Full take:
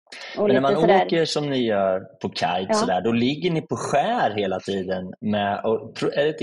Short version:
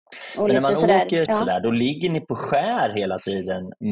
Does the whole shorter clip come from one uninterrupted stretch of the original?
no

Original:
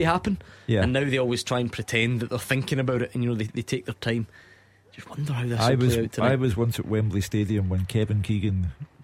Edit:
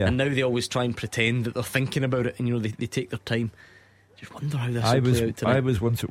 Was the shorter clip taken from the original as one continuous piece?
yes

